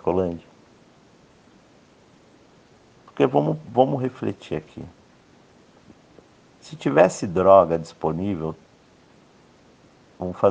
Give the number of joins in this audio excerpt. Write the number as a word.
one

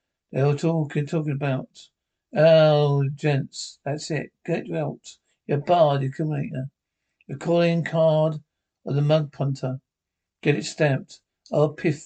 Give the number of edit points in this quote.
zero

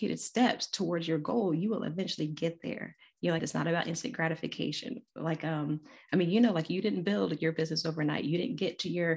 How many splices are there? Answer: one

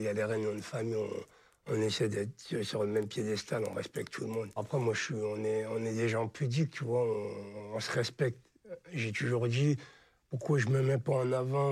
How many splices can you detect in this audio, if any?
one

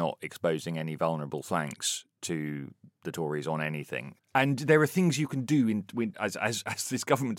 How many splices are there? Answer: one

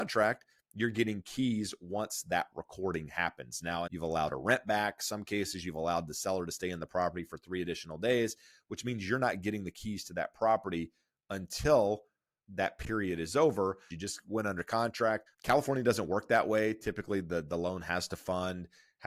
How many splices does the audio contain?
three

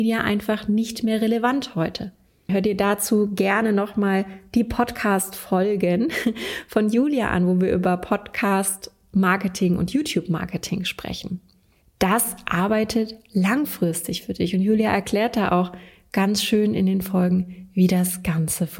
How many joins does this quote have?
one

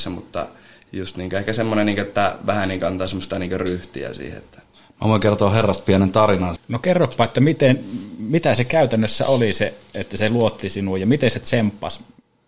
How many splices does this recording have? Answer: one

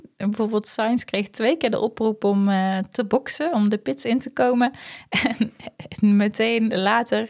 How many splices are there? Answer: zero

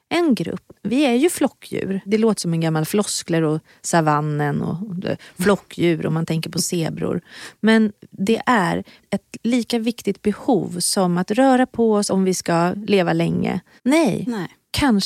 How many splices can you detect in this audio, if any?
two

